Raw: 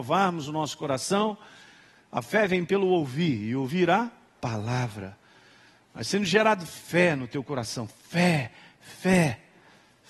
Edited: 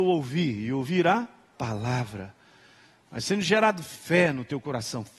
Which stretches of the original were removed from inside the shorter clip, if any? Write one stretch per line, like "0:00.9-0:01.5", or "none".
none

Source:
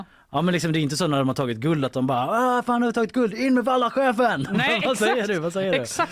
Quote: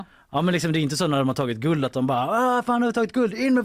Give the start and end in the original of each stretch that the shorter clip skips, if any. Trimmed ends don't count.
none

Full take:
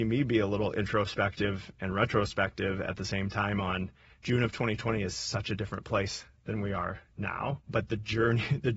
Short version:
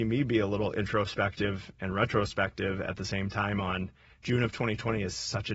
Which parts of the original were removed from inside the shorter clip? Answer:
none

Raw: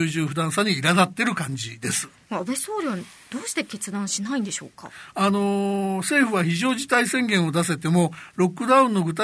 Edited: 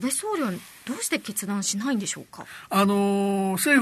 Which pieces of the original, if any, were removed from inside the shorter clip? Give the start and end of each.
none

